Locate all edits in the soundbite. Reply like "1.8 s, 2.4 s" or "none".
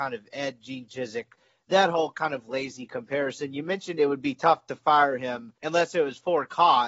5.6 s